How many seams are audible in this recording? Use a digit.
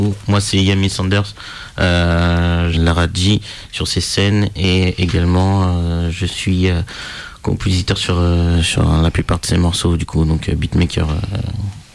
1